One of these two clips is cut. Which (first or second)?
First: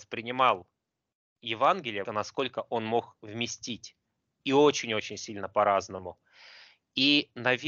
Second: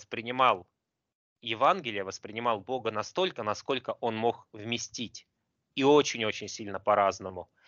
first